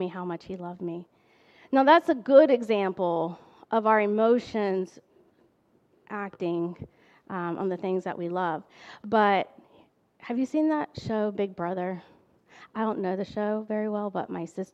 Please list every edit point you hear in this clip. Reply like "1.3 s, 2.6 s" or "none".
none